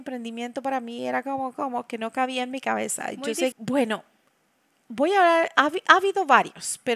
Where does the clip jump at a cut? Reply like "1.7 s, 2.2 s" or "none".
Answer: 3.5 s